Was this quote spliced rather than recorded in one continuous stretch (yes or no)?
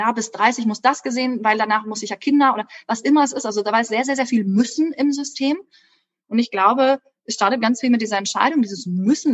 no